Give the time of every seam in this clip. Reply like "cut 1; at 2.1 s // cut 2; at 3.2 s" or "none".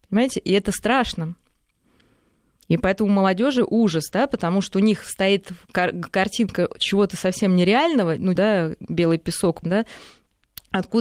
cut 1; at 8.4 s // cut 2; at 9.6 s